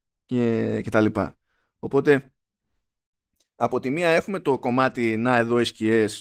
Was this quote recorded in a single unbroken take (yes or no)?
yes